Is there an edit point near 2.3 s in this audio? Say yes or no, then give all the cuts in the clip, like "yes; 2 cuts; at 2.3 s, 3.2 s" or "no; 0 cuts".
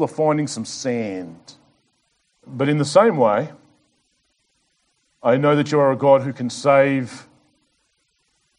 yes; 1 cut; at 2.3 s